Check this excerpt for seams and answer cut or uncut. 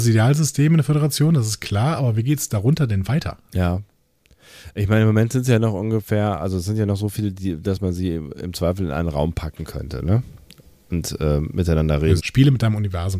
cut